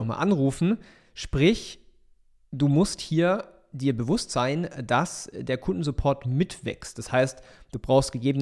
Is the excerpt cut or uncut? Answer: uncut